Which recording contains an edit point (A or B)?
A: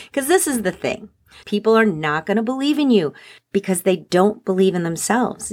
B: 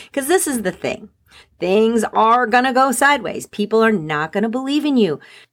A